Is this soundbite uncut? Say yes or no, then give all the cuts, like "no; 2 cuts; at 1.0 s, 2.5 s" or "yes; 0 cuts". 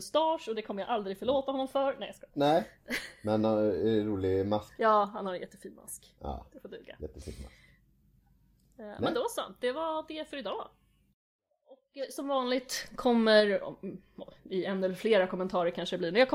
no; 1 cut; at 4.8 s